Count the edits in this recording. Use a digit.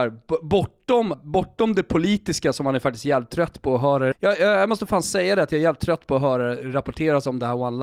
2